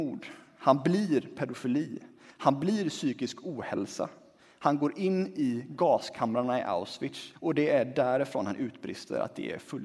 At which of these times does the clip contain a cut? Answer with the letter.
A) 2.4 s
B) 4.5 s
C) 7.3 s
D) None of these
C